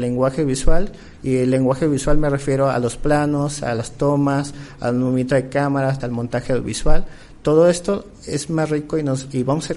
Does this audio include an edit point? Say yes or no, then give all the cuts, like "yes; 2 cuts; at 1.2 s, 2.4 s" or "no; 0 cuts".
yes; 1 cut; at 6.0 s